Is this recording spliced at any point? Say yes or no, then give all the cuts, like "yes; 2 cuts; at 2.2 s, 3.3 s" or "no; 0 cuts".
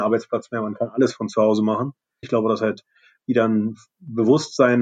yes; 1 cut; at 2.2 s